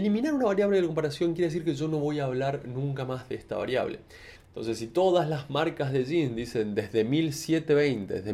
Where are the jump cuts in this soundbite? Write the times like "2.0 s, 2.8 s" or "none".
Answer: 4.4 s